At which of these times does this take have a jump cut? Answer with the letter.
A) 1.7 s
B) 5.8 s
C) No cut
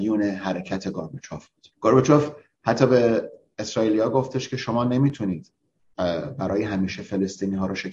A